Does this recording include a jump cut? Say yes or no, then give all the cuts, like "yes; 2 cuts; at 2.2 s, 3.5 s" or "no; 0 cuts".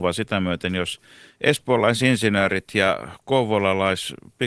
no; 0 cuts